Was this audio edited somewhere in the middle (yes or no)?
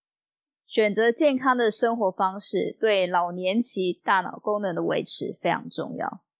no